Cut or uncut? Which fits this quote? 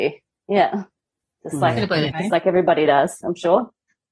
cut